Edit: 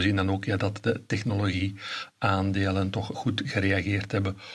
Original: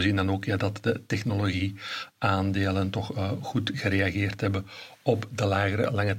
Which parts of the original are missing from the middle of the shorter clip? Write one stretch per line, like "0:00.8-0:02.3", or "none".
0:03.1-0:03.4